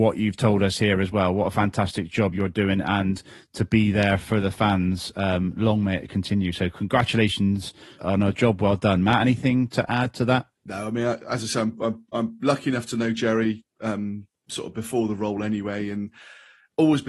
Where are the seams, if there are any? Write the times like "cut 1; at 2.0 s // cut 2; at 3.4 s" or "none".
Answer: cut 1; at 8.0 s // cut 2; at 10.6 s